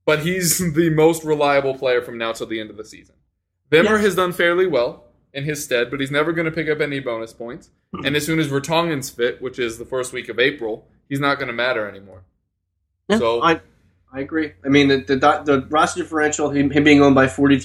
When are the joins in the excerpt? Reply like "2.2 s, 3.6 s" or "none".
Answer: none